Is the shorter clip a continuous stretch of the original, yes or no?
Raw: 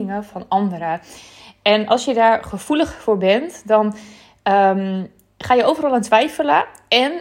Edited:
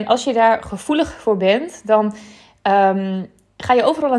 yes